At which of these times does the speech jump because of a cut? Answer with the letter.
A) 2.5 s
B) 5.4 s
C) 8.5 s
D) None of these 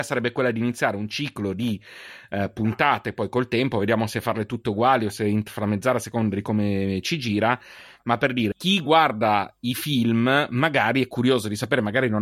C